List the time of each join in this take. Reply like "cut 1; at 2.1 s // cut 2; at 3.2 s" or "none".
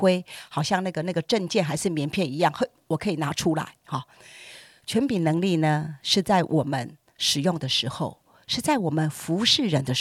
none